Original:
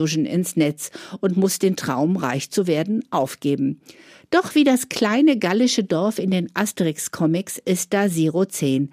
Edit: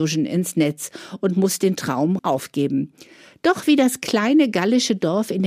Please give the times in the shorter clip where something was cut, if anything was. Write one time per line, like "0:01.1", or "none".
0:02.2